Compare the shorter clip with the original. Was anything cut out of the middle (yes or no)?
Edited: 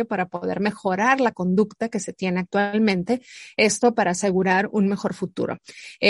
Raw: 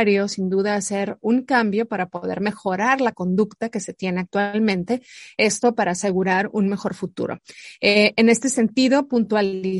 no